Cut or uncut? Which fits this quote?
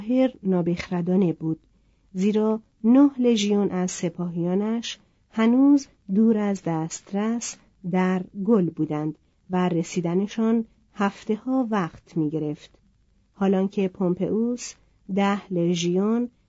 uncut